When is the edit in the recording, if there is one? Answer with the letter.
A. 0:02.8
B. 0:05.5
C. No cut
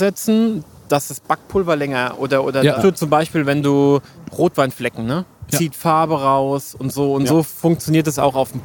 A